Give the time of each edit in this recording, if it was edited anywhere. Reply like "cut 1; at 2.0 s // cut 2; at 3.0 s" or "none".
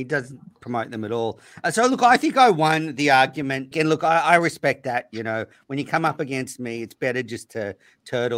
cut 1; at 3.7 s